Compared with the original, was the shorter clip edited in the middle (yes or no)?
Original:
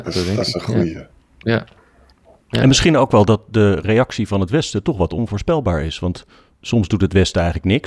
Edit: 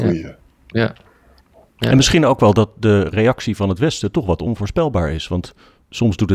no